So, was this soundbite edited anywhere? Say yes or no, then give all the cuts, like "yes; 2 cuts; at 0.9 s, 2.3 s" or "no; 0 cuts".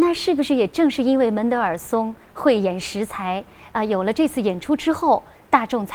no; 0 cuts